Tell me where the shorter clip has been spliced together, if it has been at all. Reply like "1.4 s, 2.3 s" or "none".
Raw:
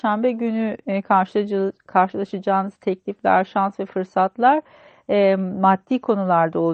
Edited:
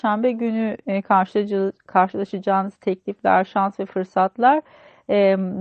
none

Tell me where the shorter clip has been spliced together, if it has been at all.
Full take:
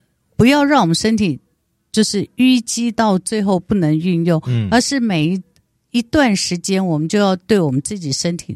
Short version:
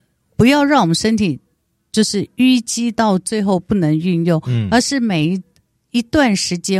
none

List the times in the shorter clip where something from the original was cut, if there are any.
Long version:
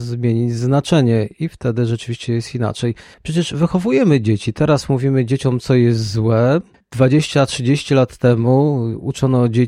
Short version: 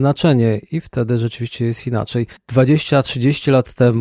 2.4 s

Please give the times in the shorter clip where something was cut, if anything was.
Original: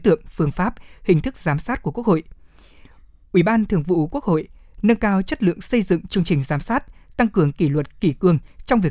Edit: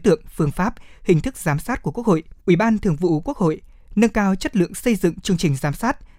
2.4 s

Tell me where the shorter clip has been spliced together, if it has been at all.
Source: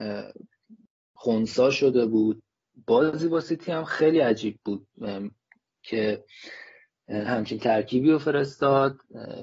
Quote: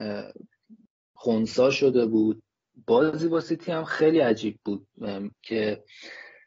5.3 s

